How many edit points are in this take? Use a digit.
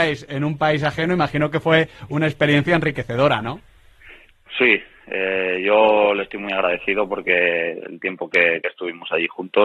0